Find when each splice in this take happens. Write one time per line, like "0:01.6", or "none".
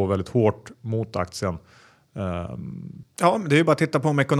0:03.0